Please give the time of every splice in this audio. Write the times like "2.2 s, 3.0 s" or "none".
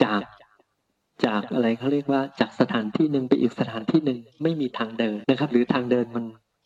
5.2 s